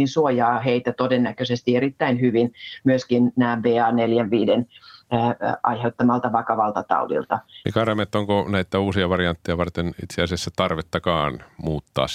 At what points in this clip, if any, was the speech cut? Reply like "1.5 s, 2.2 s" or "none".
7.6 s

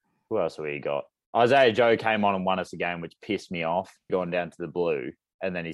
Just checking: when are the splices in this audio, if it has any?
4.1 s

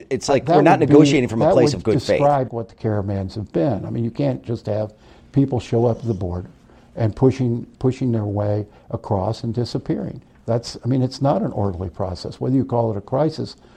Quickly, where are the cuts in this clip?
2.5 s

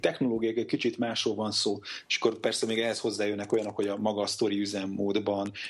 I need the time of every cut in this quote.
2.1 s

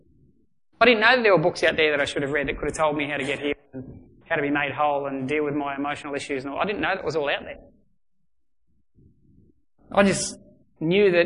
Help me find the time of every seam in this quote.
none

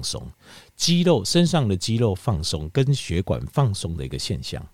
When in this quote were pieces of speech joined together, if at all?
none

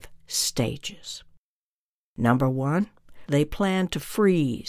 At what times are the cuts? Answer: 3.3 s

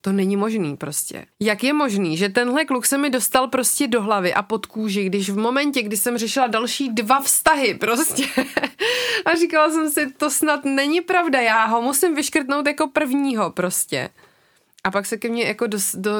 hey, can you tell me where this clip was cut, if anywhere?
1.3 s

